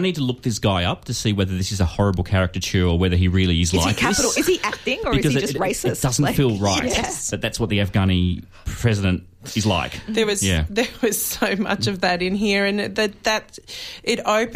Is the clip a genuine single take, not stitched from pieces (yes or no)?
yes